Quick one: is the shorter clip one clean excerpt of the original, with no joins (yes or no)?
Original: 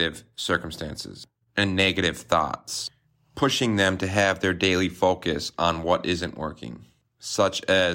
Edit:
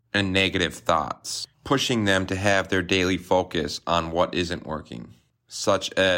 no